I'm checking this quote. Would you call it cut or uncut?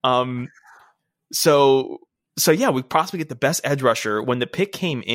uncut